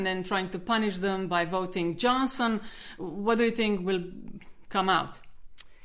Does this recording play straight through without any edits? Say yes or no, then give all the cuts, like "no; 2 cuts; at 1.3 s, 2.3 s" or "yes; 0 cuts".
yes; 0 cuts